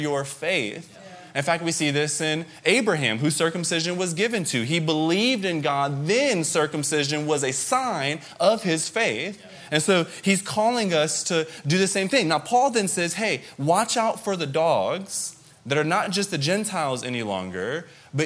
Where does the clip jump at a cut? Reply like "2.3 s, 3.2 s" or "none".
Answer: none